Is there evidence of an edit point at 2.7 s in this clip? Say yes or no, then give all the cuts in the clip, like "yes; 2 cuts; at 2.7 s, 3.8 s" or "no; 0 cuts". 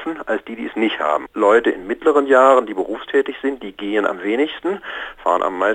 no; 1 cut; at 1.3 s